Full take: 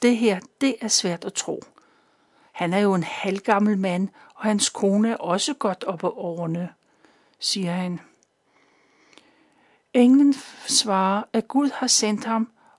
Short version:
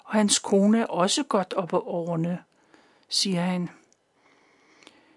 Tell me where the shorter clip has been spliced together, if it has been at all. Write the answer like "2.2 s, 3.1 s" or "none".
none

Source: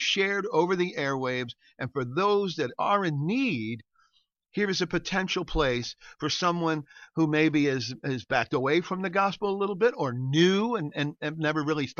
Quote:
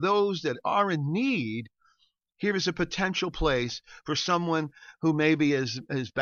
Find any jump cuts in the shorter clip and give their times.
none

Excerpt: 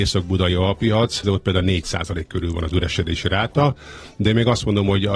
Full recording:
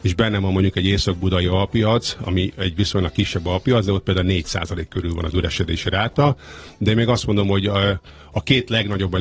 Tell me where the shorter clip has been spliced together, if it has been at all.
1.2 s

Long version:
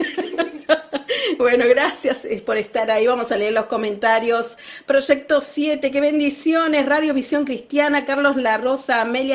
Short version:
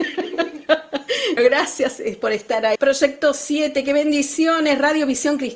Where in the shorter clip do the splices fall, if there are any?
1.4 s, 2.8 s

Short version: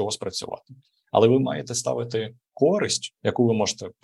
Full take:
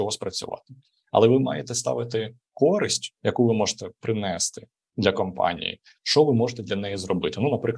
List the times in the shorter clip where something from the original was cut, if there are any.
none

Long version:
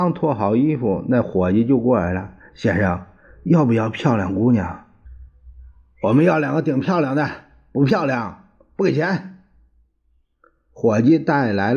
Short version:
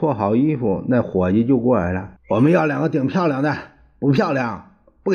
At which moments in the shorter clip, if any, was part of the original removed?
2.2 s

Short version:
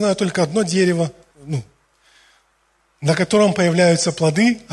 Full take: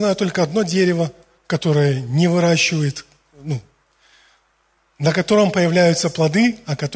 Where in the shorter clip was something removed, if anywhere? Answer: 1.3 s

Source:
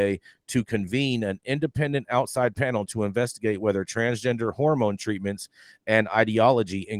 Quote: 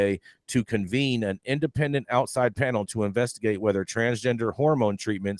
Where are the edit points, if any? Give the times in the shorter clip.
none

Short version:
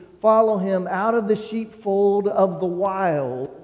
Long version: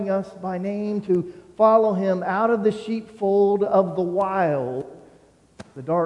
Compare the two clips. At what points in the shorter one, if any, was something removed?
none

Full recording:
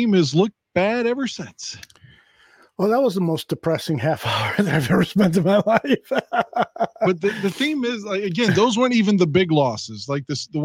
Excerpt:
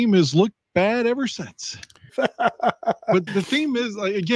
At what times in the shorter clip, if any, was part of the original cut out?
2.1 s, 3.3 s

